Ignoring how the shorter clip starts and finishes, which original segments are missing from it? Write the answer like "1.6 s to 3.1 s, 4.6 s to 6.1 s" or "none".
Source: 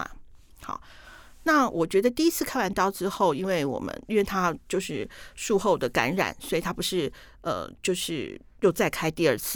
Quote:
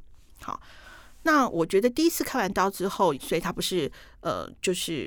3.3 s to 6.3 s